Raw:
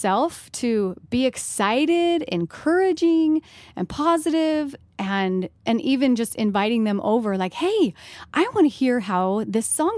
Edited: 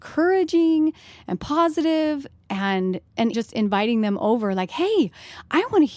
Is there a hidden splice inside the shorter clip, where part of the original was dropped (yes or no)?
yes